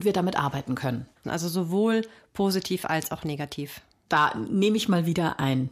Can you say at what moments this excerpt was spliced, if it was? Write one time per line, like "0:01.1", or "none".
0:01.2